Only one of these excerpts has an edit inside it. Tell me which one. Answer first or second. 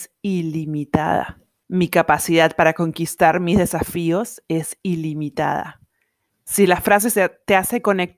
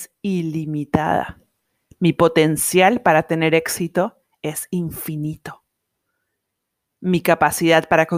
first